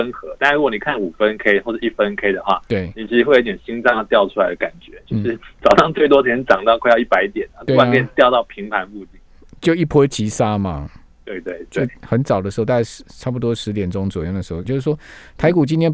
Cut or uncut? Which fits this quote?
cut